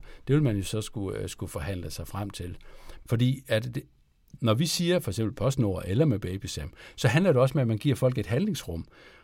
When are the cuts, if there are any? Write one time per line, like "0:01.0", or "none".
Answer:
0:03.0
0:04.4